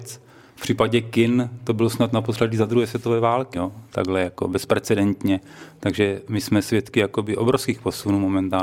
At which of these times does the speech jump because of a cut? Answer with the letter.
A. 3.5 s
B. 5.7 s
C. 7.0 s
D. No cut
A